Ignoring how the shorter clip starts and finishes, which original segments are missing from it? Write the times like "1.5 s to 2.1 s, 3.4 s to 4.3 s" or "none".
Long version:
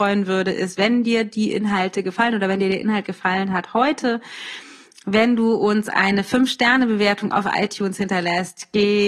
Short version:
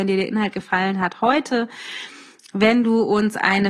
none